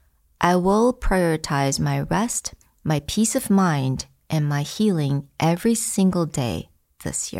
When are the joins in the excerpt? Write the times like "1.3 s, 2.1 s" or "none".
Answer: none